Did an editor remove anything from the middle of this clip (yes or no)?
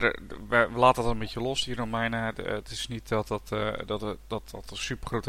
no